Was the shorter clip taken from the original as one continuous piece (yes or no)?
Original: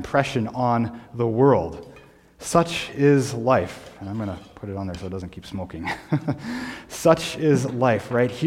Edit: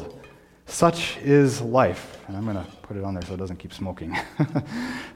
yes